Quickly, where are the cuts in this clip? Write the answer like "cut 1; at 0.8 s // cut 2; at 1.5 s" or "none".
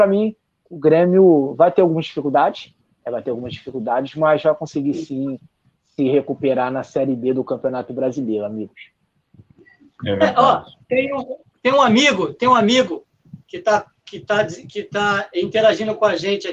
none